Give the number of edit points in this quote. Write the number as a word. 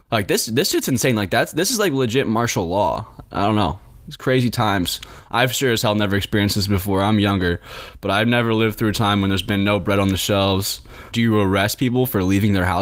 one